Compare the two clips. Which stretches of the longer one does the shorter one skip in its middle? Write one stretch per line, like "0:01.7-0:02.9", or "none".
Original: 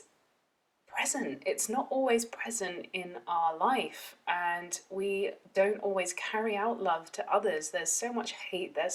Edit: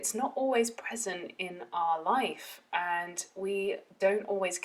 none